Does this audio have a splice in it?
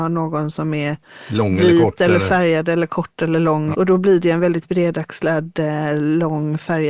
yes; 1 cut; at 3.7 s

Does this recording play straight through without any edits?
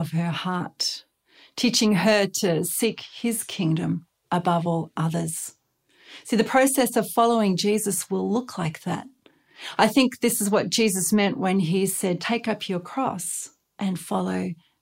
yes; 0 cuts

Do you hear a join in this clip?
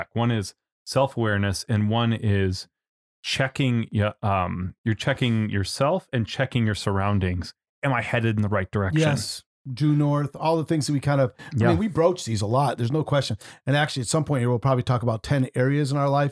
no; 0 cuts

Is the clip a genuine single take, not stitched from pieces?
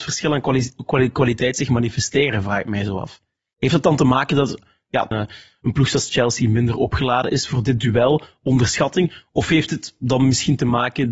no; 1 cut; at 5.1 s

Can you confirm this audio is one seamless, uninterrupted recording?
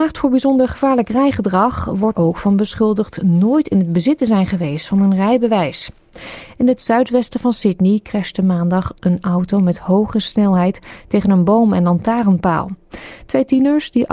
no; 1 cut; at 2.1 s

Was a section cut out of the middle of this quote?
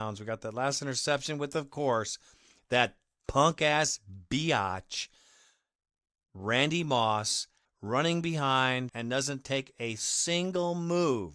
yes; 2 cuts; at 7.6 s, 8.9 s

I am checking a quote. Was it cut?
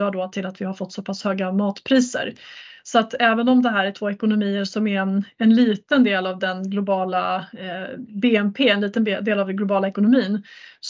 no; 0 cuts

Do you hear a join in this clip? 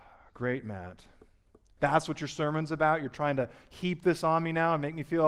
yes; 1 cut; at 1.8 s

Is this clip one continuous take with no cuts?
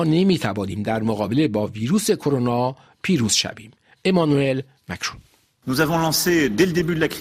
yes; 0 cuts

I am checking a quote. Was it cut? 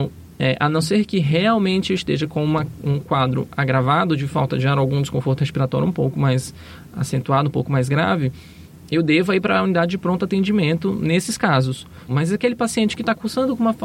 yes; 1 cut; at 12.1 s

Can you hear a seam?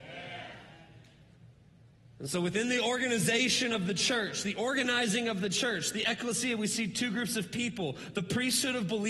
no; 0 cuts

